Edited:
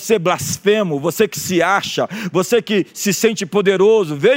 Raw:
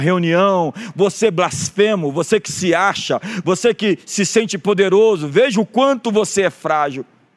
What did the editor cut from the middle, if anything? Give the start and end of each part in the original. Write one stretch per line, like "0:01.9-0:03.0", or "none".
none

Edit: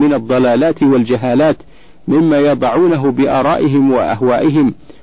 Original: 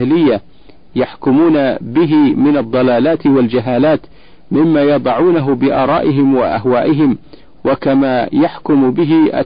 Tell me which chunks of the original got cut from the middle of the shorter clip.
none

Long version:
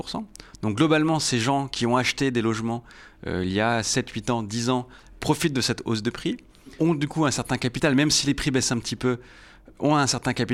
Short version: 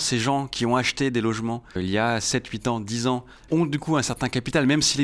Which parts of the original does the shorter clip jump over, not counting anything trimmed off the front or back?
0:03.0-0:03.4
0:05.1-0:06.8

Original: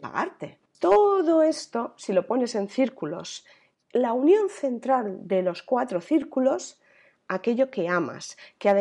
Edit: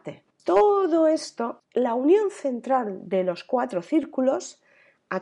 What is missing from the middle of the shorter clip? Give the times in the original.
0:01.9-0:03.8

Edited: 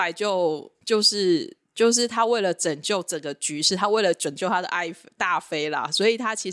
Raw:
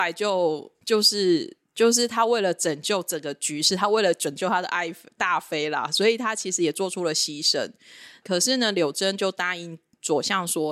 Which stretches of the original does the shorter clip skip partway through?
none

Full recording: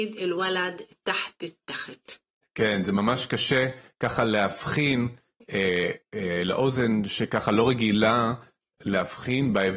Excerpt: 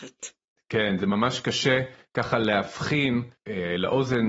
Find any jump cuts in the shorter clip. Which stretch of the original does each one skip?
0:05.2-0:06.0

